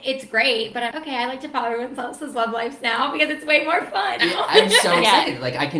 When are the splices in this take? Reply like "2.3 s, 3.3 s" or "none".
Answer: 0.9 s, 4.2 s